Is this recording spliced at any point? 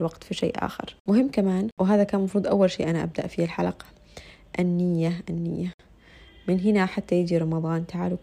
yes; 1 cut; at 5.2 s

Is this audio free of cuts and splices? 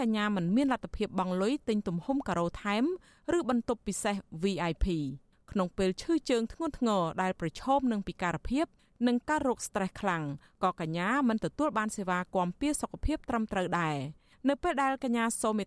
yes; 0 cuts

